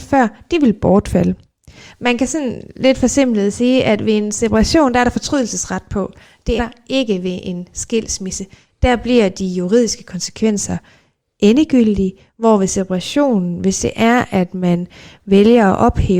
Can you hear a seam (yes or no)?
yes